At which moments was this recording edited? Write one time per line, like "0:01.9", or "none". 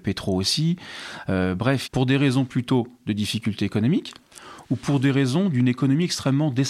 0:01.8